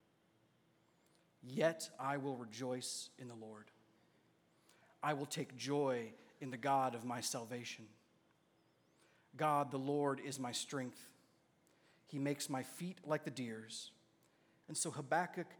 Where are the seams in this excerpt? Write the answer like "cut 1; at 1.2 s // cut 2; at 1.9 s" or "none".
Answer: cut 1; at 14.6 s